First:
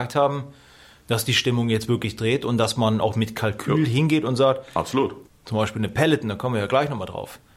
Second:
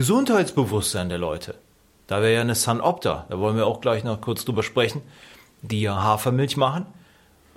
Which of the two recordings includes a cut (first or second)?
first